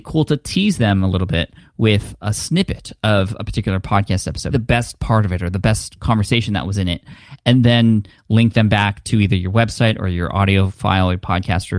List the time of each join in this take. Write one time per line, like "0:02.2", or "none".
0:04.5